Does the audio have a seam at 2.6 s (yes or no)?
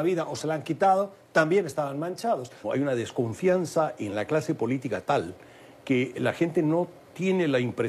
yes